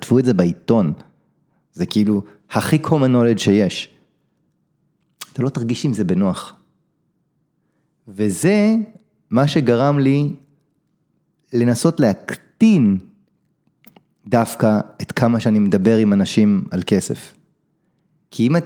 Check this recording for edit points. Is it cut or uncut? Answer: uncut